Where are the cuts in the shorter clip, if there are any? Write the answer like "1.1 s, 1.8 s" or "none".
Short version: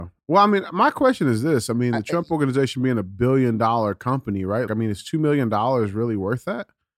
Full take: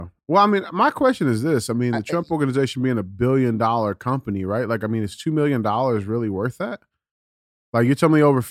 4.7 s